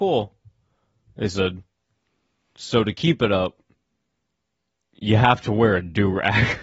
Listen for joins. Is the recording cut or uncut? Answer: uncut